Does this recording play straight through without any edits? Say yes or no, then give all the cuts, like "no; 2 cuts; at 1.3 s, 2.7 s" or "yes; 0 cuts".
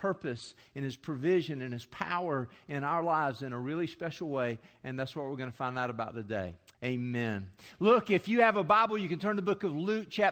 no; 1 cut; at 6.7 s